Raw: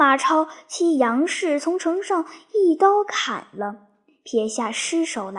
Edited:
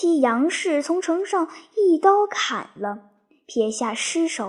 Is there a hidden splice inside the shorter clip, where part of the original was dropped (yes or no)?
no